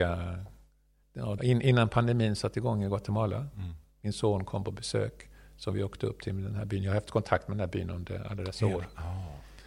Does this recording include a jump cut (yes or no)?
yes